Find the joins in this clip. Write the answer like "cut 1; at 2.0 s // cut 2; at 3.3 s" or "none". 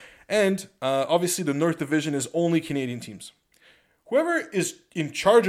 none